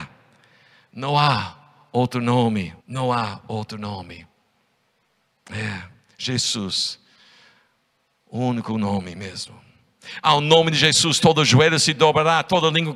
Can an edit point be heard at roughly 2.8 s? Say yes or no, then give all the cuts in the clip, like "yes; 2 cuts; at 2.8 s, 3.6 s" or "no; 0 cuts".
yes; 2 cuts; at 2.8 s, 10.2 s